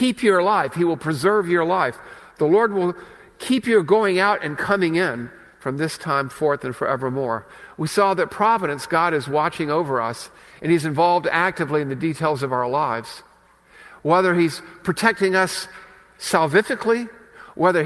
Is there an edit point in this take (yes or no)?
no